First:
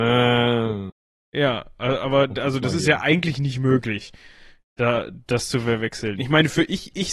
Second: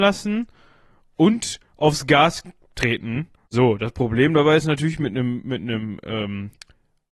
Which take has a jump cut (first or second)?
second